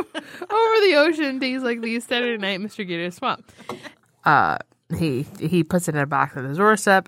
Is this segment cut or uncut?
cut